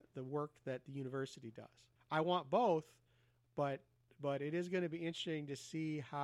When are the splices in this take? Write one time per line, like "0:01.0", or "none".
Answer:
0:02.0